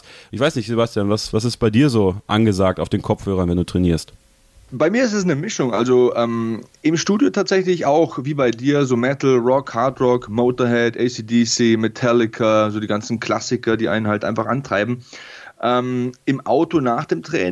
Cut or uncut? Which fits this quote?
uncut